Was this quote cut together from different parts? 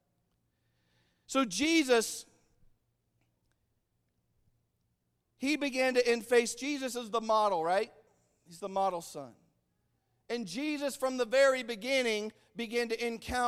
no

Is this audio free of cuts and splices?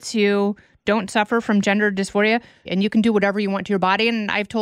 no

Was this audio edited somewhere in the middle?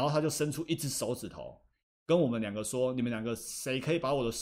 yes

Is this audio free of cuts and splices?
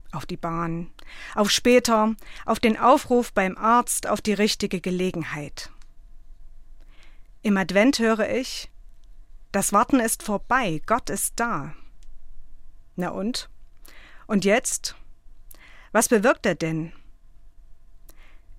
yes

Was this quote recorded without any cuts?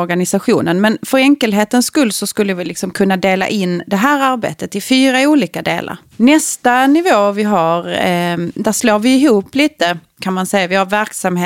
no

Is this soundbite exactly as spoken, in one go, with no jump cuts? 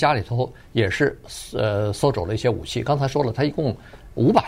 yes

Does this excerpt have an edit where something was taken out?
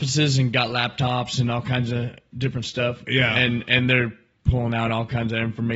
no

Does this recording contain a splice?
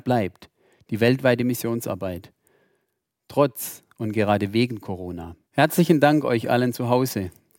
yes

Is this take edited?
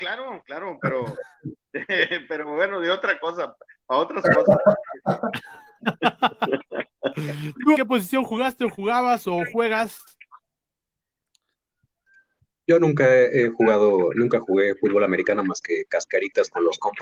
yes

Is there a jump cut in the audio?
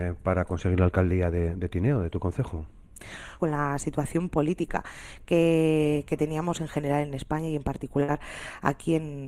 yes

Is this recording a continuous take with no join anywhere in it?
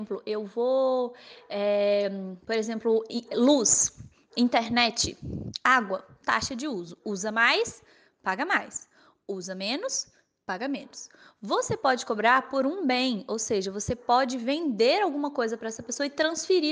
yes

